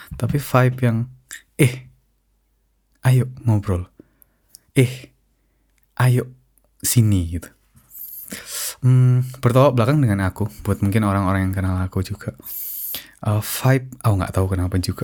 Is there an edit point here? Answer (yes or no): no